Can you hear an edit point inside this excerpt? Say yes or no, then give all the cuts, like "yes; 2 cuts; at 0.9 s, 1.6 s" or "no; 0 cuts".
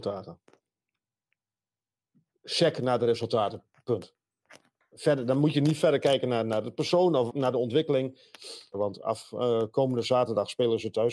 yes; 2 cuts; at 7.3 s, 8.7 s